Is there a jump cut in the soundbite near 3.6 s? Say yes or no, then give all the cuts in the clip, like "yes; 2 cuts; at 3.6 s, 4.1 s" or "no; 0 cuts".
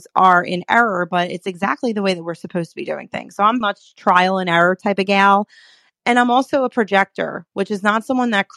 yes; 1 cut; at 3.6 s